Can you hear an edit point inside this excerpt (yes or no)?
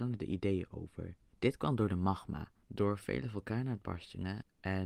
yes